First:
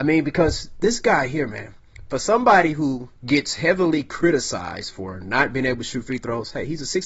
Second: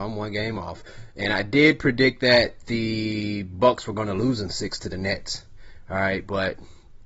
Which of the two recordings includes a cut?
first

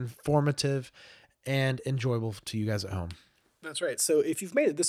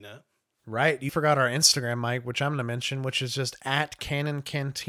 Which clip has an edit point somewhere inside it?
second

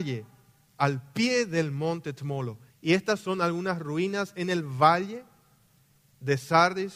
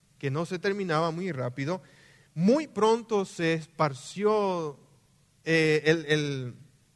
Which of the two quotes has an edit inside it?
first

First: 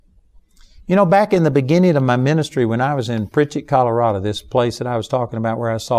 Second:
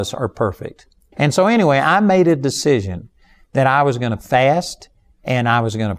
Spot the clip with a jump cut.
second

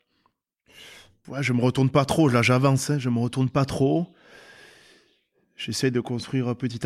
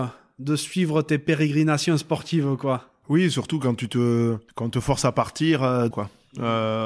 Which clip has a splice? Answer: second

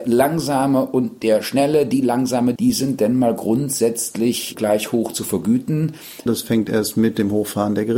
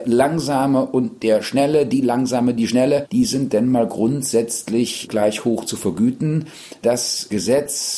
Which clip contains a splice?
first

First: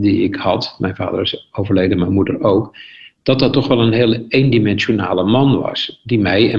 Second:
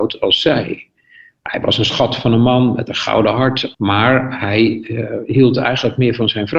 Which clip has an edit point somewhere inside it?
second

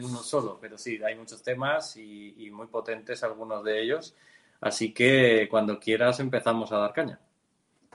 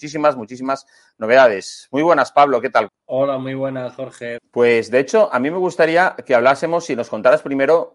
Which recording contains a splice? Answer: second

